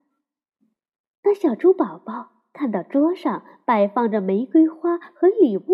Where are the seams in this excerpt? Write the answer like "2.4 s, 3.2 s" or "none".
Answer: none